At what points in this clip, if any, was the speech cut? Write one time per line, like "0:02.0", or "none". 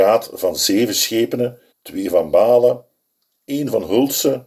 0:01.7